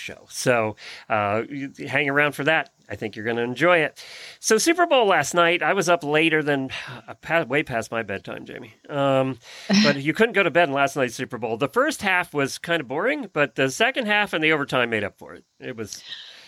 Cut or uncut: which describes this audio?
uncut